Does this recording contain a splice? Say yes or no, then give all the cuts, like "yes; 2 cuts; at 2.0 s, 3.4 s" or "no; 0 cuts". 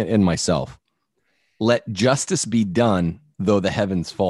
no; 0 cuts